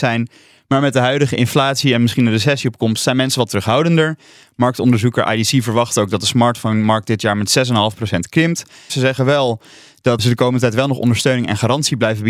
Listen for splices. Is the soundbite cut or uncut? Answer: cut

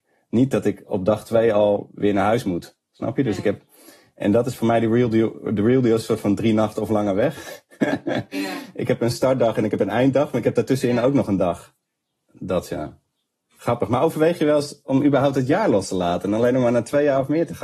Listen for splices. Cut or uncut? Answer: uncut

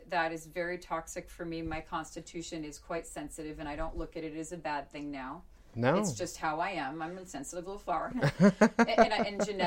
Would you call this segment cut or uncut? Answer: uncut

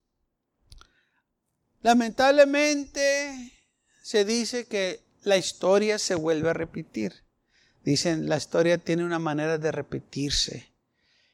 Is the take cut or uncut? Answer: uncut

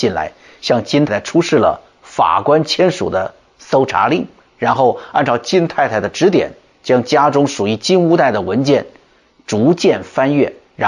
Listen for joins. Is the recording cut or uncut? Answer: cut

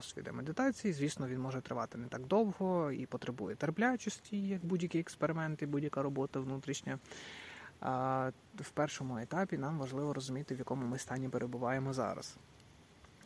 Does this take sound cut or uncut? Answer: uncut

